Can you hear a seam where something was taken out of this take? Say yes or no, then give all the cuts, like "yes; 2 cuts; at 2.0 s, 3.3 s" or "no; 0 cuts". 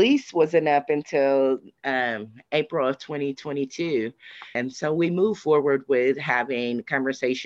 yes; 1 cut; at 4.6 s